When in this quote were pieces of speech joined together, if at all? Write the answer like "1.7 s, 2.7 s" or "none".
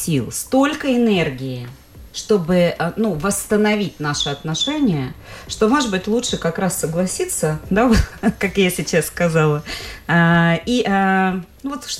none